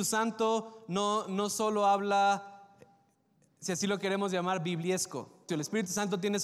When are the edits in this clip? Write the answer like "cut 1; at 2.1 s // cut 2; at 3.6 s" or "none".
cut 1; at 5.5 s

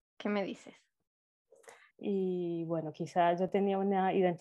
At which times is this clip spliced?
cut 1; at 1.9 s

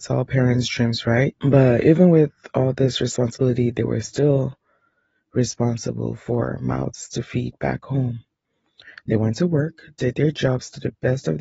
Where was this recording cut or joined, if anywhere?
cut 1; at 1.4 s

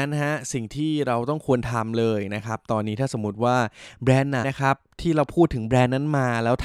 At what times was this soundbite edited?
cut 1; at 4.4 s

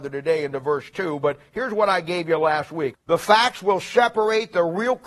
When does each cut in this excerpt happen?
cut 1; at 2.9 s

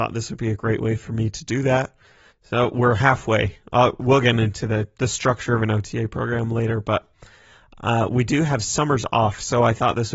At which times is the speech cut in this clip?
cut 1; at 2.3 s

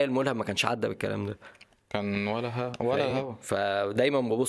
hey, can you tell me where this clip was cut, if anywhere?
none

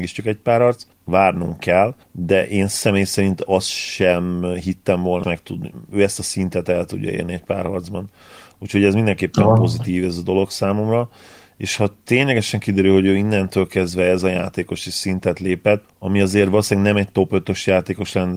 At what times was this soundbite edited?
cut 1; at 5.2 s

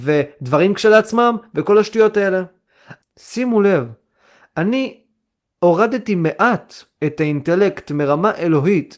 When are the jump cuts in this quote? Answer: cut 1; at 3.0 s

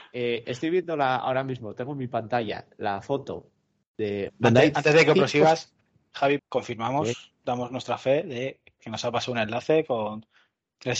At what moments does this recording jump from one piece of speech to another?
cut 1; at 4.3 s // cut 2; at 6.4 s

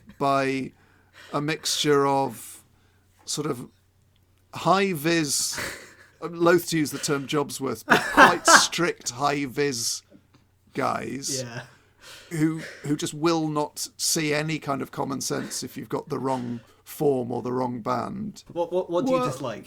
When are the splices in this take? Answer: cut 1; at 6.1 s // cut 2; at 12.3 s // cut 3; at 18.5 s

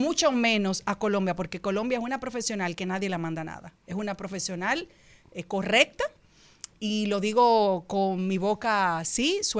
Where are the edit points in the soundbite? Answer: none

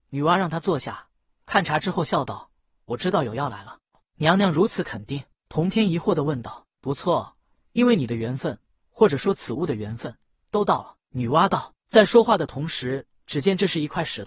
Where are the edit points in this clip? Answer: cut 1; at 13.2 s

